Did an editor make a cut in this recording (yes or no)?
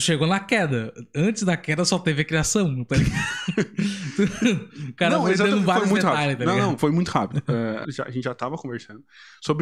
yes